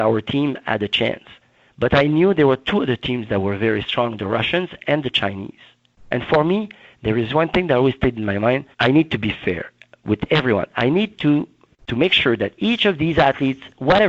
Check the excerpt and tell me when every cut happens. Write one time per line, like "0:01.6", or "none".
0:08.7